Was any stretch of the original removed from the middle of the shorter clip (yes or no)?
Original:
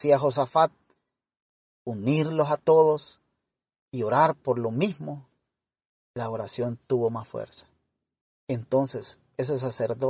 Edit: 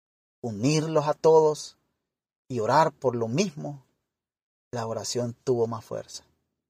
no